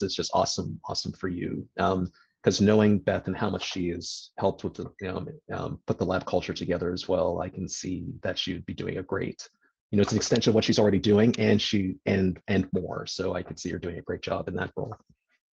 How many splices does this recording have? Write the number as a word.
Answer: zero